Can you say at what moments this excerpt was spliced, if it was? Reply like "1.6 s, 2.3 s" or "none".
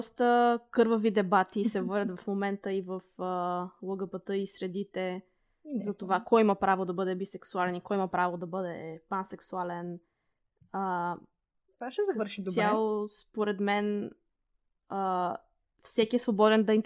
none